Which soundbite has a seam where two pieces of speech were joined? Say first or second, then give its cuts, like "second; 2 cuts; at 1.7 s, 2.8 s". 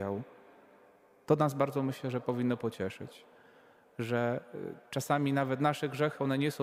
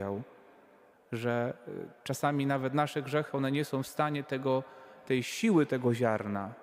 second; 1 cut; at 0.9 s